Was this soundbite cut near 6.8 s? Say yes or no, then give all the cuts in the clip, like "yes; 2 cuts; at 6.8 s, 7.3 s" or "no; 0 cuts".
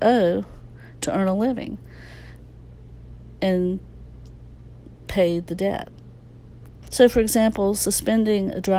yes; 1 cut; at 6.8 s